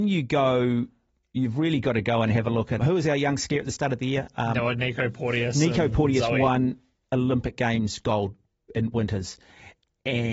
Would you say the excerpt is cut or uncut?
cut